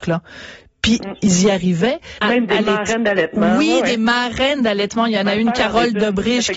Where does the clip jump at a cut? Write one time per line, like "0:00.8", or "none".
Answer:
0:02.2